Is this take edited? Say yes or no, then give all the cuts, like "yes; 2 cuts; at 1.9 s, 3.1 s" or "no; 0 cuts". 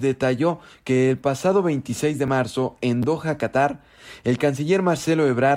no; 0 cuts